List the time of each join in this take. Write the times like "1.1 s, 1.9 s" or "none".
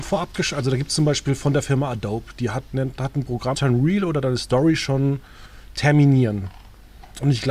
3.5 s